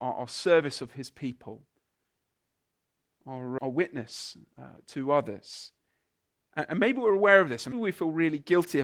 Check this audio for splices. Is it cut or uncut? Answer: cut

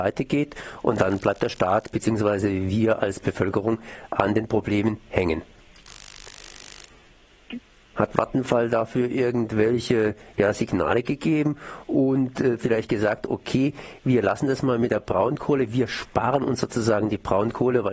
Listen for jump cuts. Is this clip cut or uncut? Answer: cut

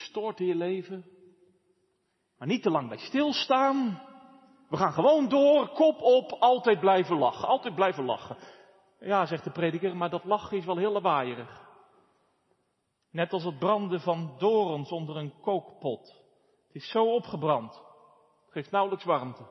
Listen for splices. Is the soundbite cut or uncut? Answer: uncut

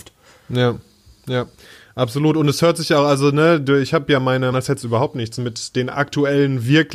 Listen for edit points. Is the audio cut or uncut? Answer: cut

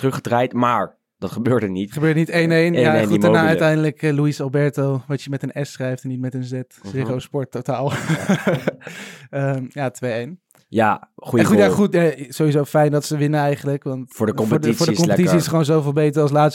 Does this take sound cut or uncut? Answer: uncut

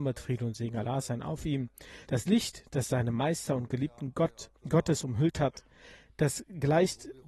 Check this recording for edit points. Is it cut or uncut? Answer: cut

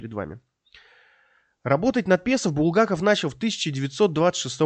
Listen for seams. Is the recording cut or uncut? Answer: uncut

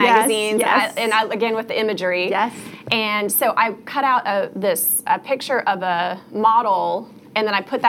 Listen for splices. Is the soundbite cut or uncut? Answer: uncut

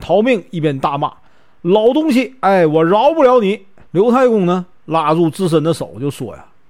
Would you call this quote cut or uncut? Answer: uncut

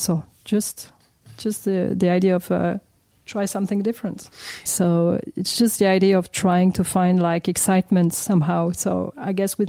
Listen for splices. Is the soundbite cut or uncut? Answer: cut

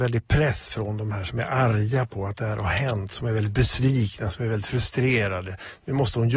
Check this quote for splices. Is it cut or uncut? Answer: uncut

